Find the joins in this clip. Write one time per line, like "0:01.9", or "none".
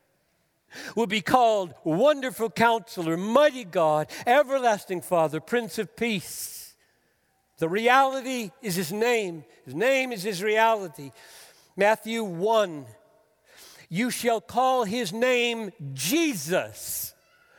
none